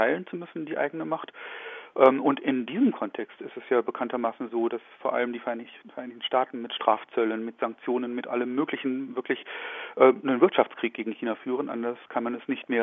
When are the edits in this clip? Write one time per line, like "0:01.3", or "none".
none